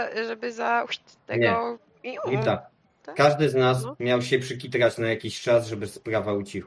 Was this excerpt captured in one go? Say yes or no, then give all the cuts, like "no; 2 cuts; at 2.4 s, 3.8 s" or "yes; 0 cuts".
yes; 0 cuts